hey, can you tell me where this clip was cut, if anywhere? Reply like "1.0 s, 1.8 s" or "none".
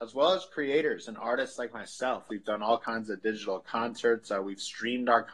2.3 s